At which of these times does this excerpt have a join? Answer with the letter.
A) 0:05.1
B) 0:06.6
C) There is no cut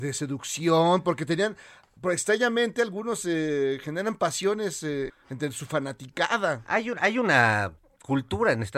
A